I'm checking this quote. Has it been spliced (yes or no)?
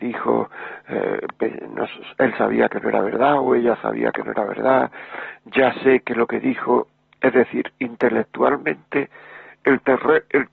no